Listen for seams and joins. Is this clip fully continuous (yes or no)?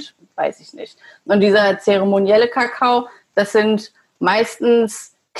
yes